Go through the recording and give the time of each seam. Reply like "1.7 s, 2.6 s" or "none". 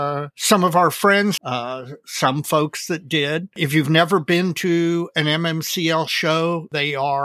1.4 s